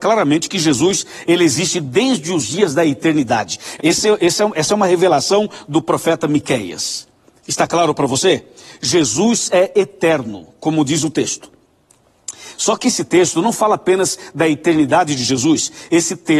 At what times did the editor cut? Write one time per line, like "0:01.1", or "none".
0:03.8